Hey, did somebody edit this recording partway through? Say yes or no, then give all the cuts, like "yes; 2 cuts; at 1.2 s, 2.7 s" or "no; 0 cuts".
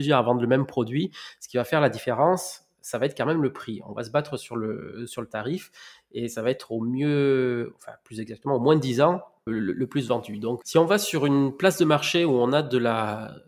yes; 2 cuts; at 9.5 s, 10.6 s